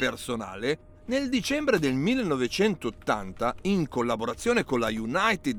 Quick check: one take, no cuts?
no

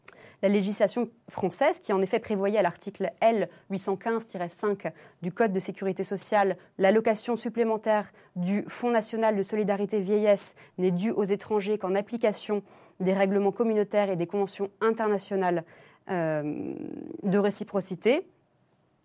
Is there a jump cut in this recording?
yes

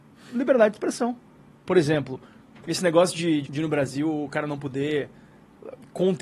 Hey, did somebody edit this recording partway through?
yes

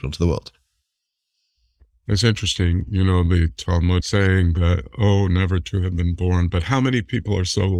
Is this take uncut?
yes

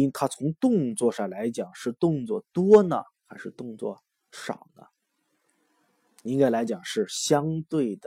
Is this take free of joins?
yes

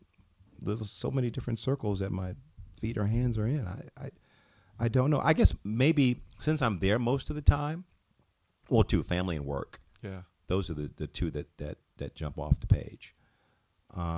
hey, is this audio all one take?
yes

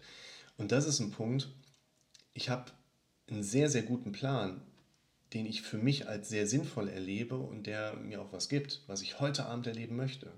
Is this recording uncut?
yes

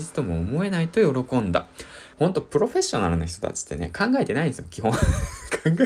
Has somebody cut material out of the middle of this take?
yes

